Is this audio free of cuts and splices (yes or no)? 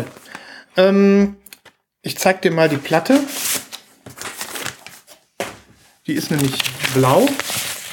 yes